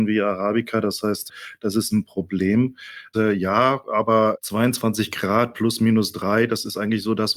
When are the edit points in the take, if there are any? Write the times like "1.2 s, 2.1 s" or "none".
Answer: 3.1 s